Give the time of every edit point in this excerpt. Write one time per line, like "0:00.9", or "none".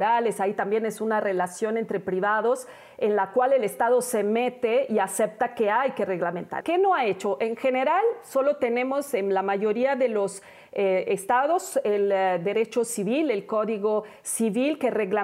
0:06.6